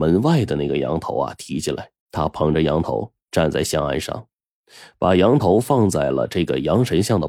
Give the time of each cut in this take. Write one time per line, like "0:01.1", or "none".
0:02.0